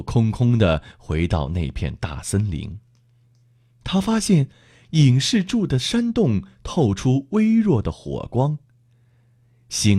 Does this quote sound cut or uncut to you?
uncut